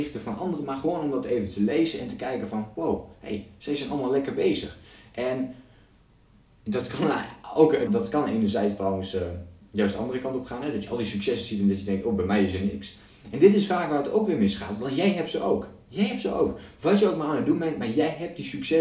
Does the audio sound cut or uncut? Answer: cut